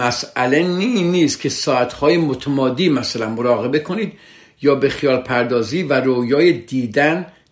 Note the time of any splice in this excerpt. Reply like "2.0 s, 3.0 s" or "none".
none